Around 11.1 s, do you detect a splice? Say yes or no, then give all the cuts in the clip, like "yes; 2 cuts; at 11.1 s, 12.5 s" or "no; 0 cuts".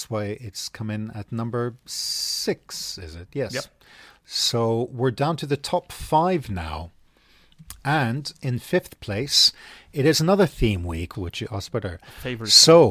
yes; 1 cut; at 11.1 s